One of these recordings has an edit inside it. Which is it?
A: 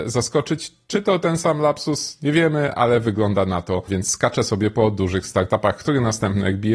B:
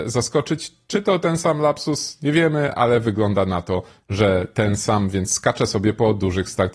A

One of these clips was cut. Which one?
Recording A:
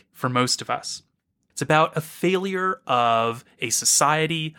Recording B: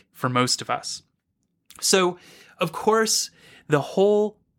A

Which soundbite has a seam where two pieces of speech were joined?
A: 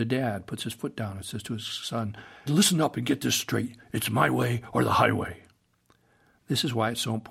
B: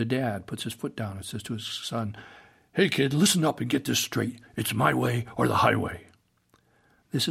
A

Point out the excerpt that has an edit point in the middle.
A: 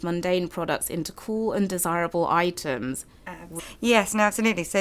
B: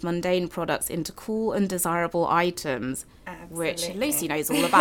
A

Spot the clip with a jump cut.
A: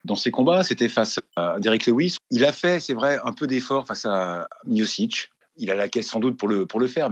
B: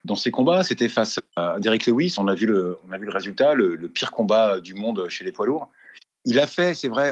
A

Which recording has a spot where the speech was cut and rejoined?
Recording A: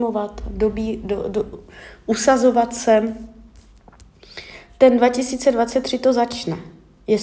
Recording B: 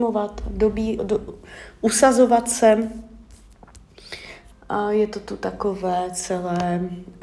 B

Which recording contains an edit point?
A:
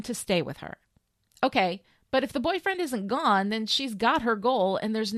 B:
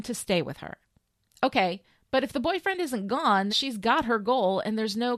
B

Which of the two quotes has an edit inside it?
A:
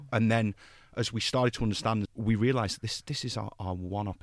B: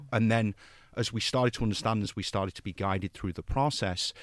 A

